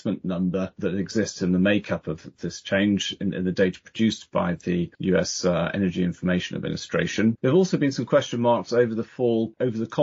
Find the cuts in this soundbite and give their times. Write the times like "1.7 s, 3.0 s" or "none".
4.9 s, 7.4 s